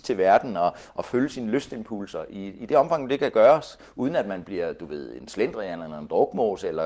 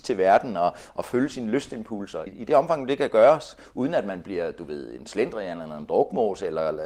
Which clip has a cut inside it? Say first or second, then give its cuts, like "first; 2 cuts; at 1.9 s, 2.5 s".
second; 1 cut; at 2.3 s